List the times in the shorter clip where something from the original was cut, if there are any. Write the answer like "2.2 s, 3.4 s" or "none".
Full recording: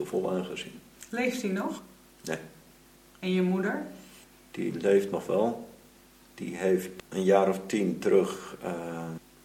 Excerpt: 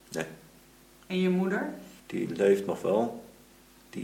2.0 s